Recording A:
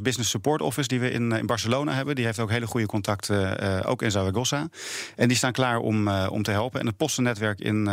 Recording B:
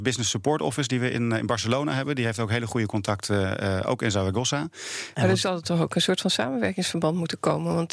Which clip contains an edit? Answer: B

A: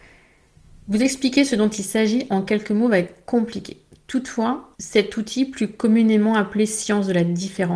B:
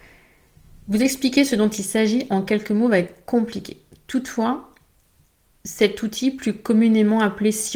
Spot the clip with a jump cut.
A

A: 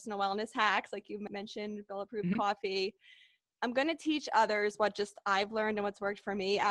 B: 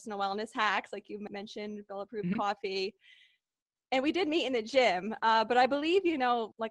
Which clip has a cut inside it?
A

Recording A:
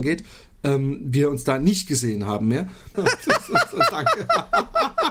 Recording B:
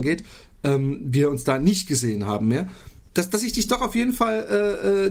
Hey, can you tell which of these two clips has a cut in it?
A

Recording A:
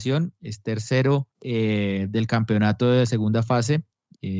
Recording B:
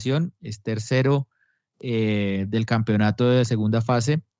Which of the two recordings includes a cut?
A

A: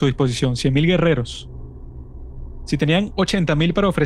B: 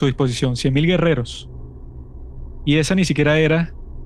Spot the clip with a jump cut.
A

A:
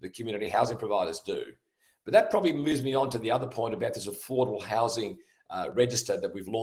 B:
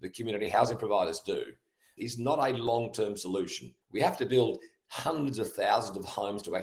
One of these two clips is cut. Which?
B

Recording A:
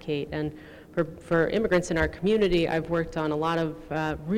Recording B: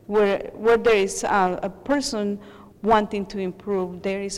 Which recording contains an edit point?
B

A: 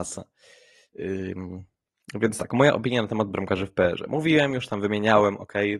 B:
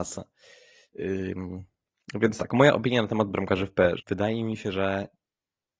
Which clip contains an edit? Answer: B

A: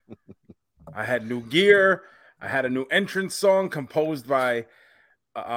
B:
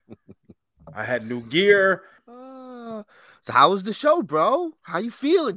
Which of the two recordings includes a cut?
B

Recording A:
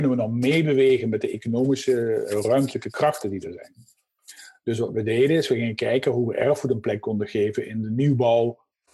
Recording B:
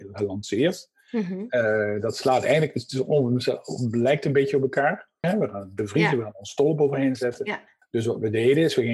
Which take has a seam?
B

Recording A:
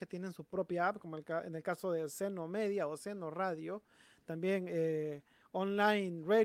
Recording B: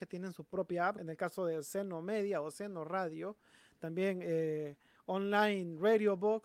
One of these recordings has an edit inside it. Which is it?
B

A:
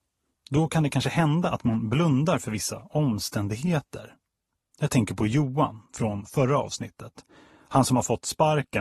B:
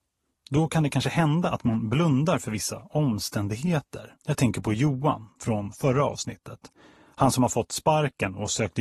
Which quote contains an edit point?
B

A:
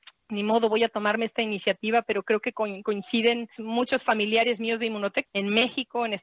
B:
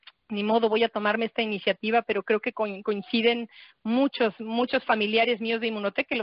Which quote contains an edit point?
A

